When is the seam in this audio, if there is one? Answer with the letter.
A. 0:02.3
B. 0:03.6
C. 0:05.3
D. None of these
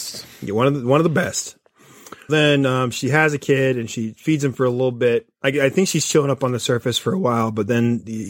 A